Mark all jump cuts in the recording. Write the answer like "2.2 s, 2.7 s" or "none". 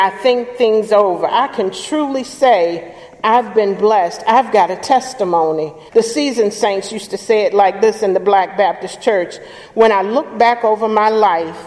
5.9 s